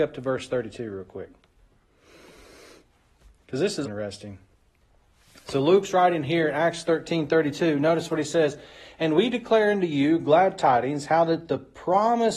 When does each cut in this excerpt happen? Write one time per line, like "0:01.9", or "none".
0:03.8